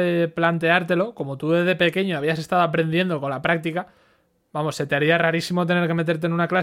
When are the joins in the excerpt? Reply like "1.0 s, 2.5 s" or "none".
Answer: none